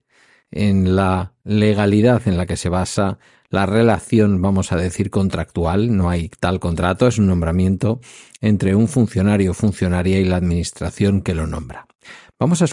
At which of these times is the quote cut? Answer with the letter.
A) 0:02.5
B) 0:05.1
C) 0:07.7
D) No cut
D